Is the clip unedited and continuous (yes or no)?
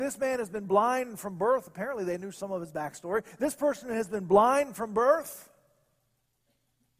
yes